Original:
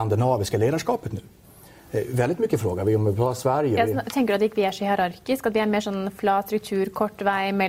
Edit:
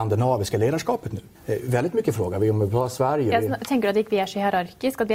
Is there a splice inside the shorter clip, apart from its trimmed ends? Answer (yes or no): yes